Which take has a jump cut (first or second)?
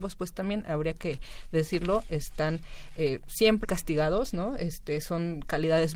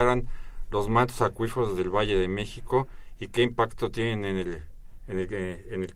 first